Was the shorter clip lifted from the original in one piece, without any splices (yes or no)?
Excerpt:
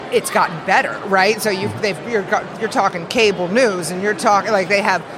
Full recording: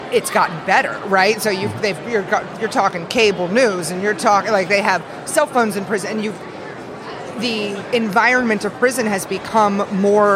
yes